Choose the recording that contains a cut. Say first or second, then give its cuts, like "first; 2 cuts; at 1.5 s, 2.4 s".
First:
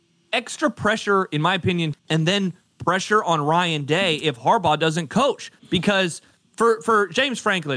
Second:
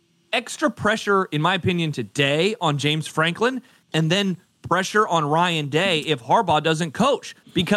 first; 1 cut; at 1.9 s